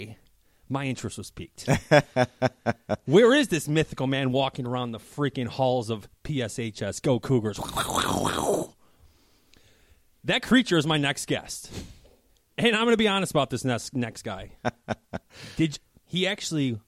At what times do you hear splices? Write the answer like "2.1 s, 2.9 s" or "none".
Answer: 14.6 s